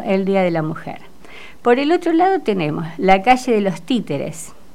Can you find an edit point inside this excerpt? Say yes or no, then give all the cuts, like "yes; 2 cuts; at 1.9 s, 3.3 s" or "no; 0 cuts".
no; 0 cuts